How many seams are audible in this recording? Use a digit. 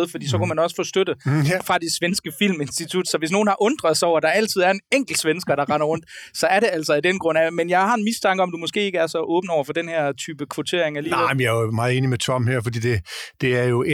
0